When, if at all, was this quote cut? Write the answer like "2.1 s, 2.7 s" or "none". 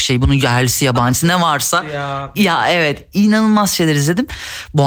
2.3 s